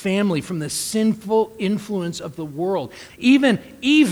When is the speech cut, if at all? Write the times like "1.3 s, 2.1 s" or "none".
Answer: 3.1 s